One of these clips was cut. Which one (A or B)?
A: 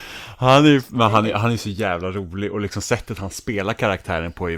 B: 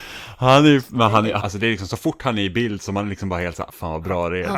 B